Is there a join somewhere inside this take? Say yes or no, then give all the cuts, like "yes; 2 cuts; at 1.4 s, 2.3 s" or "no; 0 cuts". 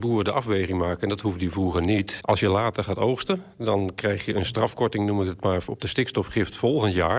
yes; 1 cut; at 2.2 s